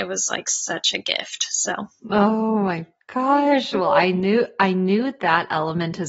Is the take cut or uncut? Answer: uncut